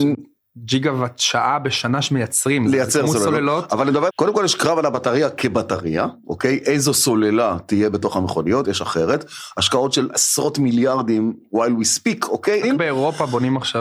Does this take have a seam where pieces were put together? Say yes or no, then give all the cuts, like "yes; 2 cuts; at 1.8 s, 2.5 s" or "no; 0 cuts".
yes; 3 cuts; at 4.1 s, 8.6 s, 12.6 s